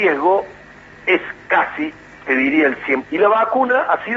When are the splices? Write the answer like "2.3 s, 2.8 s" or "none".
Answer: 3.0 s